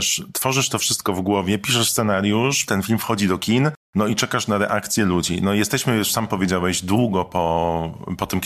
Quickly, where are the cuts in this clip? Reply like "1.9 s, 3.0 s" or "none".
2.7 s